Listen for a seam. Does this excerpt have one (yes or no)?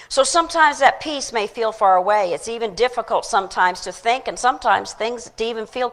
no